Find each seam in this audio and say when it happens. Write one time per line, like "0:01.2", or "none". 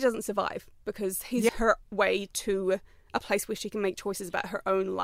0:01.5